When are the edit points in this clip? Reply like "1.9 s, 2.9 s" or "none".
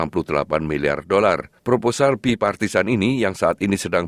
1.6 s